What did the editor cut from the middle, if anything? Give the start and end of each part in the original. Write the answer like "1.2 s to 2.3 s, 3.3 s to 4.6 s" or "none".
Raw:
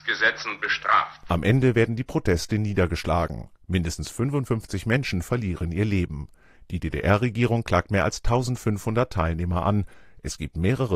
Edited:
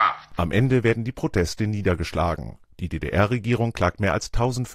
3.6 s to 6.6 s